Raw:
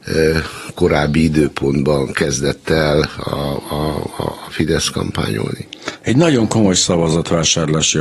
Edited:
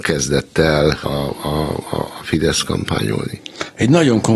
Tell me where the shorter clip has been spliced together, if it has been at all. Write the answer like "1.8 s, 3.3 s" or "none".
1.0 s